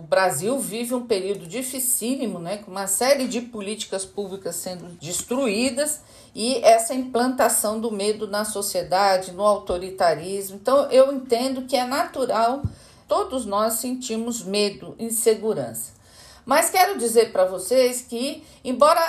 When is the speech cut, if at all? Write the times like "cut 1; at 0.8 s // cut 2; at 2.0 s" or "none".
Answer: none